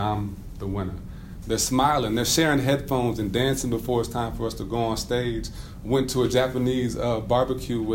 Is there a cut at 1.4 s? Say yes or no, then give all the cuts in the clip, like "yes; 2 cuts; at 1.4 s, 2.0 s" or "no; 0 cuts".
yes; 1 cut; at 1.4 s